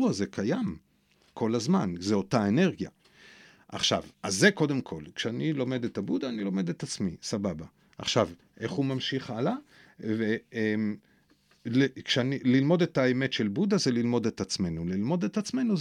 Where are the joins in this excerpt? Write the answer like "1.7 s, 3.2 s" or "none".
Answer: 4.1 s